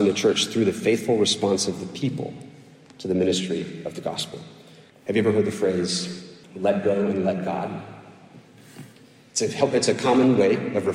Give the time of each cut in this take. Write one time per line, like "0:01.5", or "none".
0:04.9
0:06.4